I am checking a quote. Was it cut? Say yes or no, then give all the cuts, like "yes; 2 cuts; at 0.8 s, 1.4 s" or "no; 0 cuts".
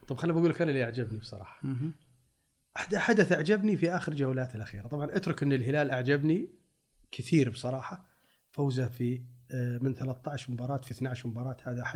no; 0 cuts